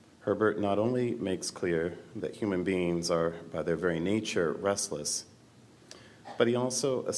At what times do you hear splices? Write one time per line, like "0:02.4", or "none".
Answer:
none